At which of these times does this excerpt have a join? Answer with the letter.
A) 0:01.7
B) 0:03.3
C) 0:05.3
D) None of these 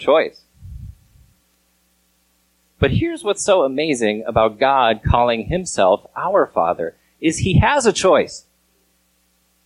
D